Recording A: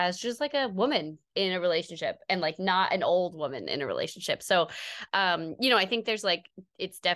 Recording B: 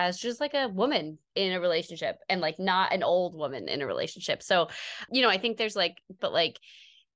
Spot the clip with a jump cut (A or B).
B